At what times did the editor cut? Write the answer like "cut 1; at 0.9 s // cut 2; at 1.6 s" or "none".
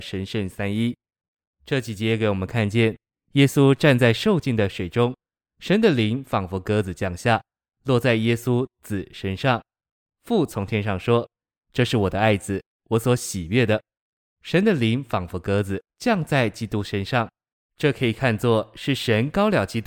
none